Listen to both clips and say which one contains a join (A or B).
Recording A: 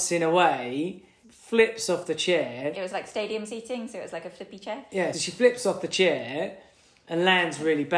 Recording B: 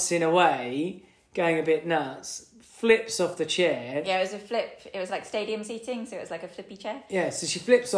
A